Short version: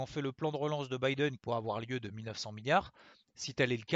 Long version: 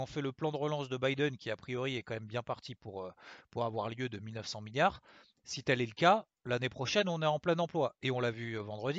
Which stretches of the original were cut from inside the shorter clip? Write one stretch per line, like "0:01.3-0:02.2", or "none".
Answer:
0:01.4-0:03.5